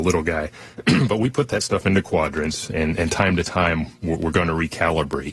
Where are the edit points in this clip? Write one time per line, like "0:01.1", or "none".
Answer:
0:02.7